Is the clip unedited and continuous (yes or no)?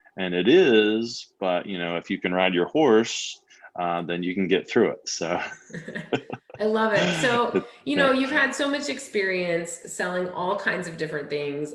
yes